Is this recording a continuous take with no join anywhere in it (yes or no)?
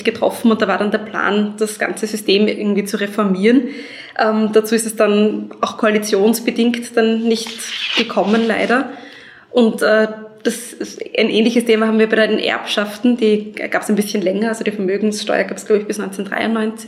yes